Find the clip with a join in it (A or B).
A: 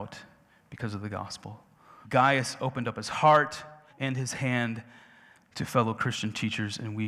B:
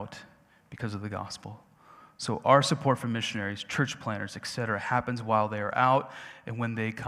A